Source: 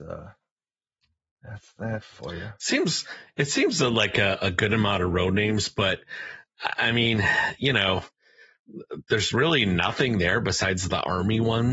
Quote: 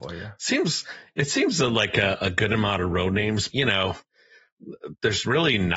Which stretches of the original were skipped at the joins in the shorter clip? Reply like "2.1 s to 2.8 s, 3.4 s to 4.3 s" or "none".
5.7 s to 7.6 s

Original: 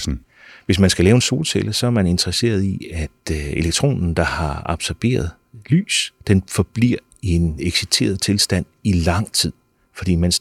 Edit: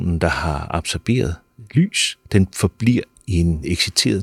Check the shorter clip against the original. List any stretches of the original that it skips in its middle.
none

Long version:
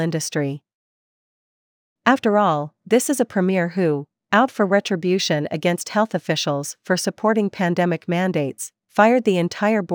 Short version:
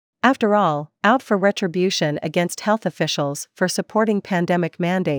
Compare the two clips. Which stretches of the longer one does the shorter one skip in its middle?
2.8 s to 4.2 s

